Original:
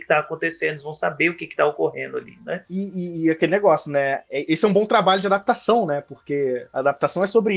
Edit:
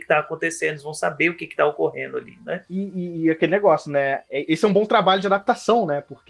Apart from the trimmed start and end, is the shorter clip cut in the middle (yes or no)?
no